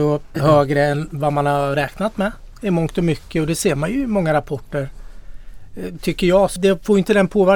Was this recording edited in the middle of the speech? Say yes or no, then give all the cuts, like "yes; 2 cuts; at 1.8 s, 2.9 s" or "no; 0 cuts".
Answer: yes; 1 cut; at 6.6 s